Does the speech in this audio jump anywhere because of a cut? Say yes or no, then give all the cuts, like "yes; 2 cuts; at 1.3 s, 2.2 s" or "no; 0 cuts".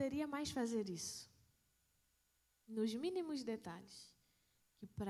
yes; 1 cut; at 2.5 s